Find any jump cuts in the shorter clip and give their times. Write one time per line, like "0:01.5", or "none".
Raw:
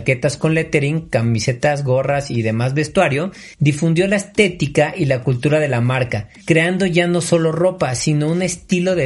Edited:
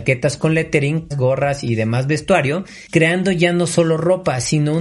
0:01.1
0:02.9